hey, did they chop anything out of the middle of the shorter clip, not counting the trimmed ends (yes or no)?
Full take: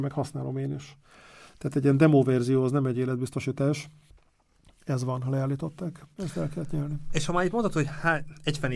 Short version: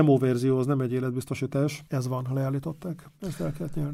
yes